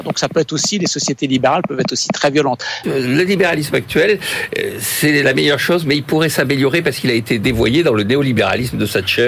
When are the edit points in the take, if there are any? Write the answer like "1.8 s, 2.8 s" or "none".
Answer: 2.8 s